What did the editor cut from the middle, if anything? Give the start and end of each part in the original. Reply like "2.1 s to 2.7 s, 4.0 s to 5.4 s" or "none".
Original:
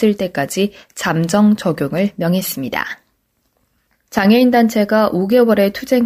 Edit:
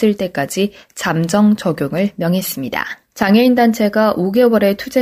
3.0 s to 4.0 s